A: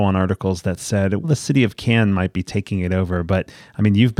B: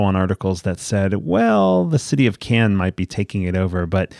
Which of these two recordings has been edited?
A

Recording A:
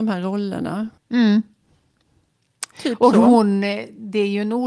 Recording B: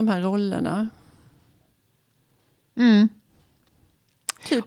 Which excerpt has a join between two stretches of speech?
A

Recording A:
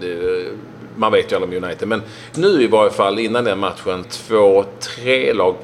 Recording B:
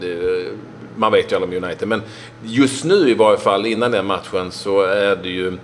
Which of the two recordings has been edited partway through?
A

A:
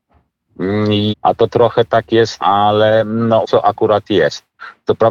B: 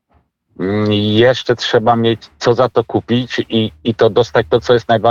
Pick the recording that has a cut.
A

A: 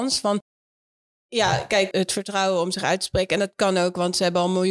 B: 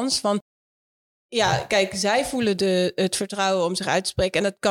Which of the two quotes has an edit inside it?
A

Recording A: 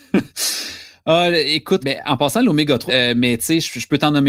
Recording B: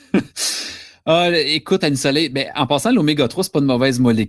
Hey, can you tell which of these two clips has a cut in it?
A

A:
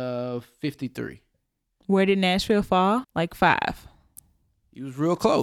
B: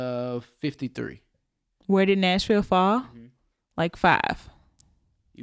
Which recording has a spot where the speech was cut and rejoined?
A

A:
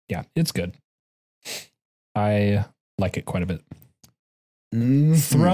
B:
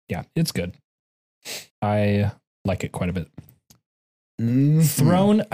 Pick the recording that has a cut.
B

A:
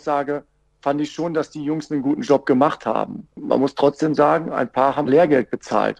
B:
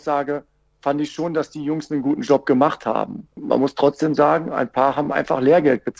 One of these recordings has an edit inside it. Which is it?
A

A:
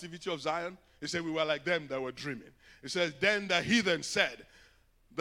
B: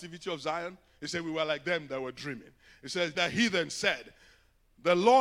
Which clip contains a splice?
B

